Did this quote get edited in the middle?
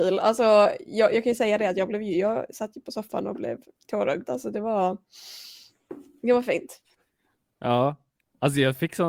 no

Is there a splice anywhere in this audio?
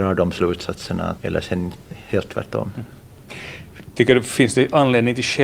yes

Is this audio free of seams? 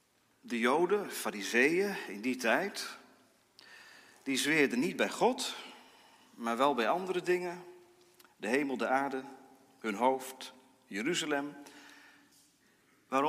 yes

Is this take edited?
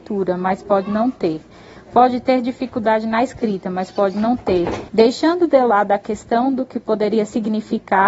yes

